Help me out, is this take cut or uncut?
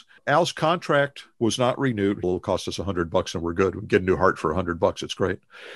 cut